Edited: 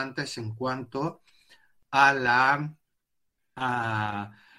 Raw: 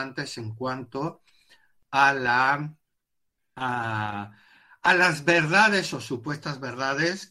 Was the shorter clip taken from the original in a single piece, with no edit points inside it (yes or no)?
yes